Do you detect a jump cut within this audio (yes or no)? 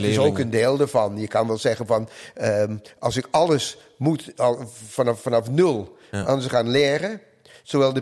no